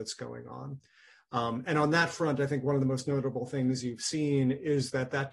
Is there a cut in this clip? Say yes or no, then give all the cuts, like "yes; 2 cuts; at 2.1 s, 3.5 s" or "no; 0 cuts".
no; 0 cuts